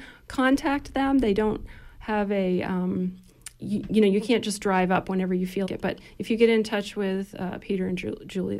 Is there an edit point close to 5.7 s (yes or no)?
yes